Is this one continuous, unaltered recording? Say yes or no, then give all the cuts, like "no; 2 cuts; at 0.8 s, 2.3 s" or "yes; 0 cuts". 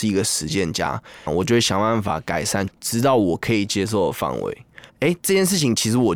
no; 3 cuts; at 1.3 s, 2.7 s, 4.9 s